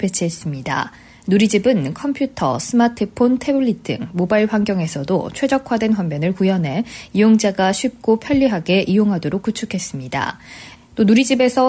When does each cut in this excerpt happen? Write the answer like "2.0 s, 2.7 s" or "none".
10.7 s